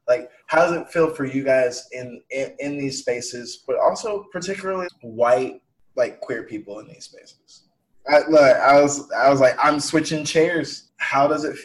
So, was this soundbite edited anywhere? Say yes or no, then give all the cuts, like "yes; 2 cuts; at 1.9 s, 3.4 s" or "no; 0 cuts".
yes; 2 cuts; at 4.8 s, 8.0 s